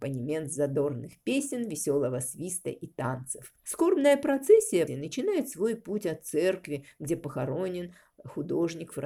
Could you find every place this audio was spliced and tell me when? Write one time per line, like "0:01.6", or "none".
0:04.9